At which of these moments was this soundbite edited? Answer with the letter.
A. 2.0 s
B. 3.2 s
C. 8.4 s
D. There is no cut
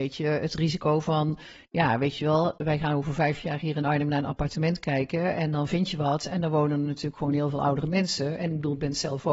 D